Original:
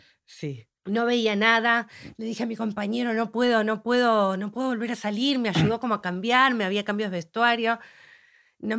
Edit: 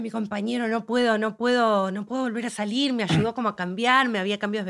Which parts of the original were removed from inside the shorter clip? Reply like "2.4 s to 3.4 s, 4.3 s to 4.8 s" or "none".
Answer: none

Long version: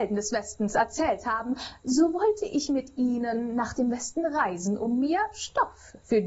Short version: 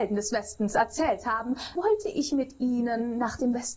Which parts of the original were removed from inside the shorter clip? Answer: 1.8 s to 2.1 s

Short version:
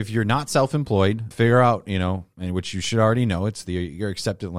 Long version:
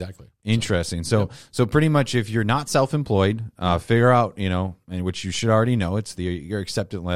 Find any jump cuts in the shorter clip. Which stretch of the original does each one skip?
3.5 s to 3.8 s

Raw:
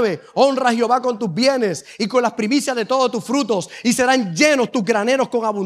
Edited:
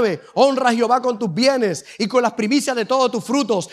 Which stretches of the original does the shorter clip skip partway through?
none

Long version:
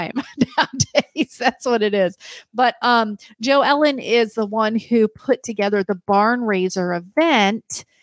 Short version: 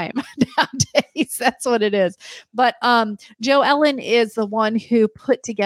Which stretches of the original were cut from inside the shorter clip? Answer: none

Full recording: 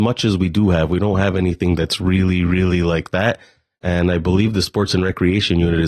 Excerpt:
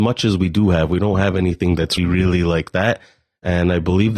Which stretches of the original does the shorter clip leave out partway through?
2.0 s to 2.4 s

